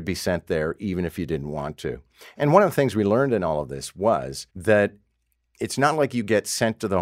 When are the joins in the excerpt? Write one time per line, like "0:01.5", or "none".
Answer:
0:04.5